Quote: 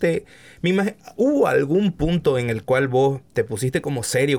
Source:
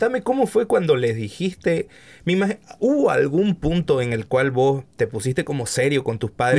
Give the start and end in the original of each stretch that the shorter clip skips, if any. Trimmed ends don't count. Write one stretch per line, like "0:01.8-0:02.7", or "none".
none